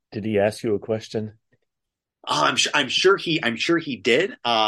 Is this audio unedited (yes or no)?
yes